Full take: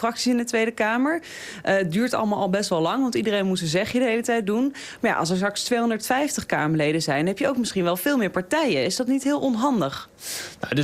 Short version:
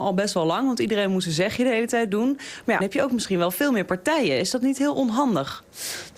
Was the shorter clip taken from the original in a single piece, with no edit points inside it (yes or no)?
no